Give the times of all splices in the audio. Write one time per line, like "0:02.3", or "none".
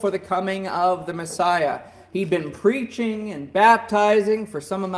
none